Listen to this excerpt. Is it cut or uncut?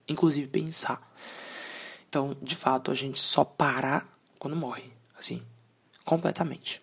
uncut